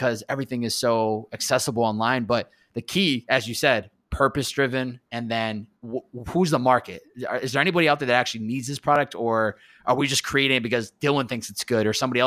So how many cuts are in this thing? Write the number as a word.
one